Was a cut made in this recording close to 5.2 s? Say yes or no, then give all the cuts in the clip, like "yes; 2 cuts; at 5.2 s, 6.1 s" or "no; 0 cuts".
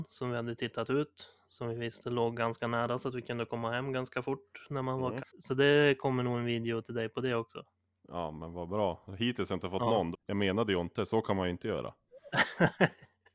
yes; 2 cuts; at 5.2 s, 10.1 s